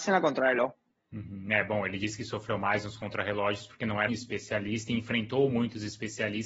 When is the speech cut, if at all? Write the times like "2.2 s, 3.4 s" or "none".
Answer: 4.1 s